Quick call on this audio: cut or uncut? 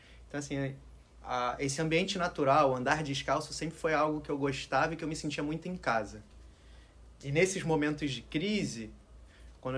uncut